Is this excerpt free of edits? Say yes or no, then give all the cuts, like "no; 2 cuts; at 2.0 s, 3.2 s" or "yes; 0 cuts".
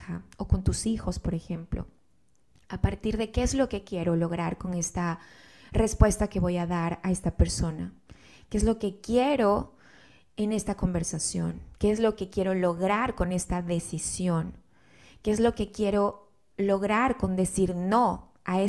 yes; 0 cuts